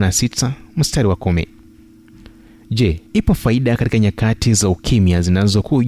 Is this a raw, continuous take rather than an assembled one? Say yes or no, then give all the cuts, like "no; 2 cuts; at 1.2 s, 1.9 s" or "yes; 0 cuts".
no; 1 cut; at 3.1 s